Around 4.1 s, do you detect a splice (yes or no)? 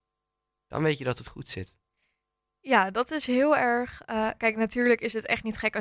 no